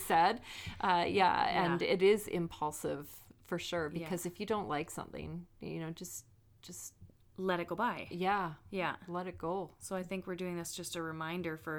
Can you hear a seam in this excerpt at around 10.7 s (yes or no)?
no